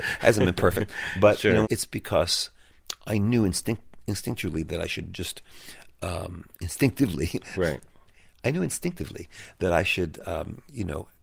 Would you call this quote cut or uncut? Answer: cut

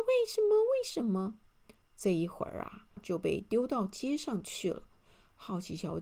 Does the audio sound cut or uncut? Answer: cut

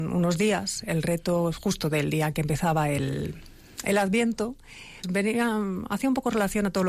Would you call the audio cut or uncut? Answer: cut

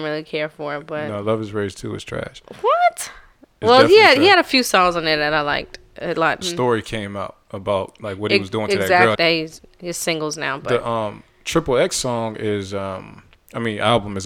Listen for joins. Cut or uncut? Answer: cut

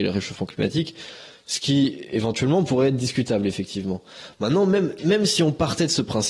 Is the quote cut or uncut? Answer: uncut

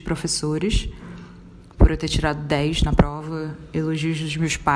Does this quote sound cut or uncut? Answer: uncut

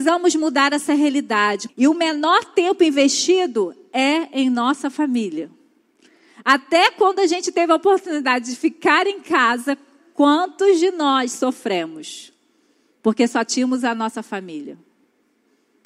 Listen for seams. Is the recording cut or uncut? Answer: cut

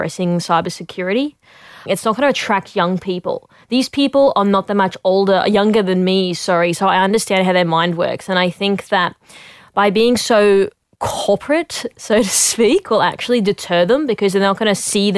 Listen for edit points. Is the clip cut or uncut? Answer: cut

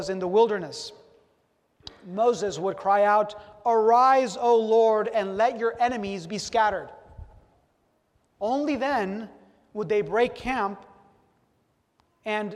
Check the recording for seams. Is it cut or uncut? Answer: uncut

